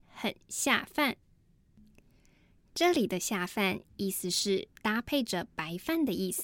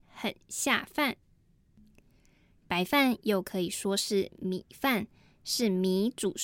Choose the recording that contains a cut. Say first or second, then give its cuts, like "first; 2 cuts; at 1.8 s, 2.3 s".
second; 1 cut; at 2.6 s